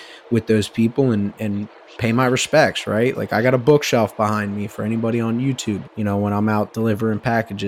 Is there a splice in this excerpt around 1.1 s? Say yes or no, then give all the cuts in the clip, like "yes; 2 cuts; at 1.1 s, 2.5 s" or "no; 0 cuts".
no; 2 cuts; at 3.1 s, 5.8 s